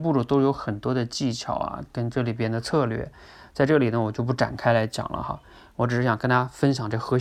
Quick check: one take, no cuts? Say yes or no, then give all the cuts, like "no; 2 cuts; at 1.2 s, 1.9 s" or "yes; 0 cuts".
yes; 0 cuts